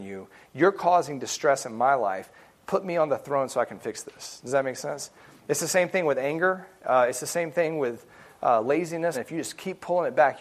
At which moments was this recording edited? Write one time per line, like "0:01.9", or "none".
0:09.1